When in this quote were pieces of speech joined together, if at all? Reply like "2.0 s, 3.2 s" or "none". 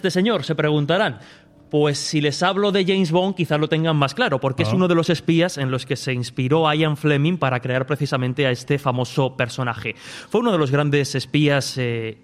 none